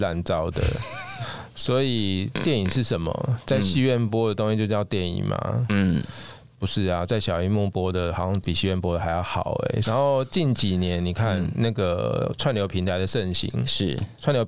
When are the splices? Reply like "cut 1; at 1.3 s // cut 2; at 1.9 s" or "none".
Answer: cut 1; at 9.8 s